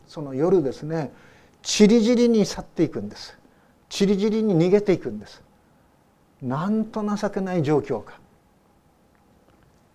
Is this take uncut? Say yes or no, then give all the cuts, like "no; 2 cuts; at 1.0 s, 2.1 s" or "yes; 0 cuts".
yes; 0 cuts